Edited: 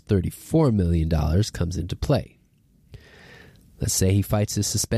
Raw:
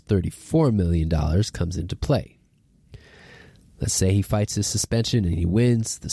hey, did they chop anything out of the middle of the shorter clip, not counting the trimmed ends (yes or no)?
no